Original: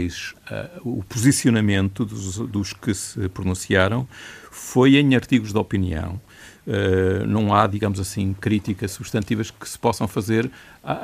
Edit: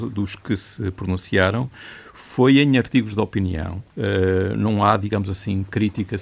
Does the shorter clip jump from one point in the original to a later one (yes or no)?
yes